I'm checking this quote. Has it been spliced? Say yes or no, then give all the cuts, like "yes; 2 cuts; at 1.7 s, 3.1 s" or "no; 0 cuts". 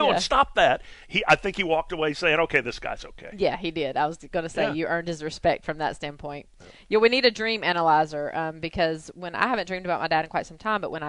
no; 0 cuts